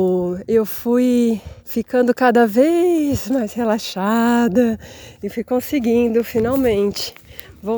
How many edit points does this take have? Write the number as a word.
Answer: one